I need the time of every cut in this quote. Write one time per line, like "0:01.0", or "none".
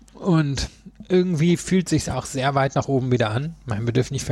none